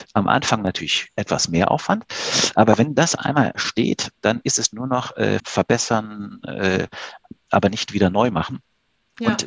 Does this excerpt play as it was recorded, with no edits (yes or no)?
no